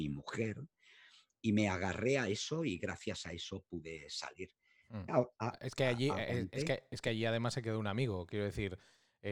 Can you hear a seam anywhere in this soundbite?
yes; 1 cut; at 5.1 s

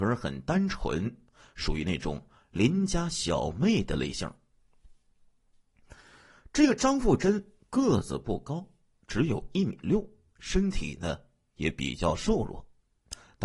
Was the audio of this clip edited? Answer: no; 0 cuts

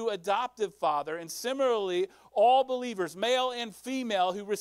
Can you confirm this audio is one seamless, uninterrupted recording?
yes; 0 cuts

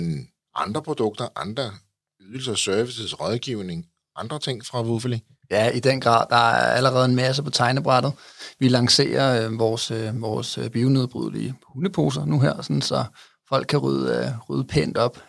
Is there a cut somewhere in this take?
no; 0 cuts

